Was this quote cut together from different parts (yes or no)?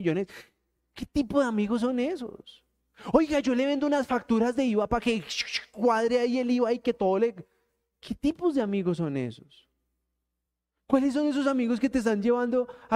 no